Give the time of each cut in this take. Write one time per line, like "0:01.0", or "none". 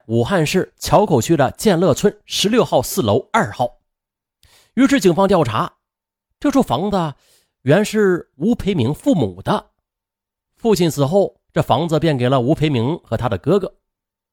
none